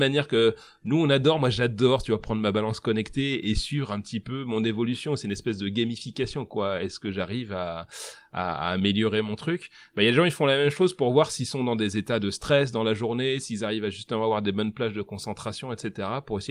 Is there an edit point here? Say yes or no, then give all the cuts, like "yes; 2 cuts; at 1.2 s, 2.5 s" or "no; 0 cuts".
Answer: no; 0 cuts